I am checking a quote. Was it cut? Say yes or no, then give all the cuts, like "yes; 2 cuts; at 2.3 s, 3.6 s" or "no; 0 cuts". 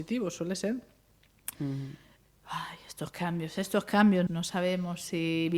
yes; 2 cuts; at 1.5 s, 4.3 s